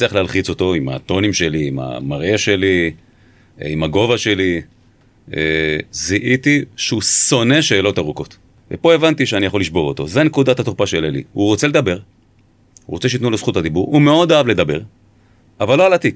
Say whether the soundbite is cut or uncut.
uncut